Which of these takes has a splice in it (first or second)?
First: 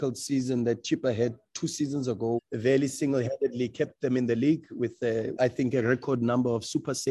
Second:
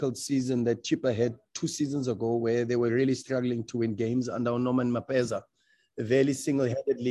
first